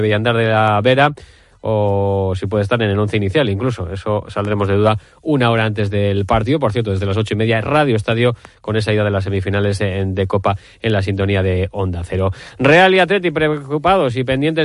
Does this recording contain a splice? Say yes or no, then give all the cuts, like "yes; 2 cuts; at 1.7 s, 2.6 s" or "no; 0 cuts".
no; 0 cuts